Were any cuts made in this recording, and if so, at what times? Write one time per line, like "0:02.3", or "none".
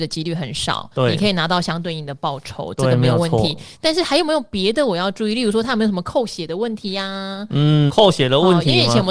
0:07.9

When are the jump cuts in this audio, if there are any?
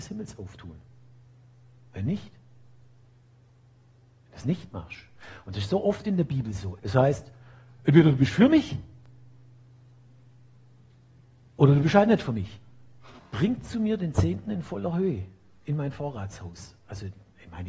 0:06.8
0:13.2

